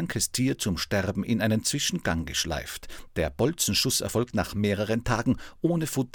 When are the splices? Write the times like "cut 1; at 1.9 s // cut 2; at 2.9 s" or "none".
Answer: none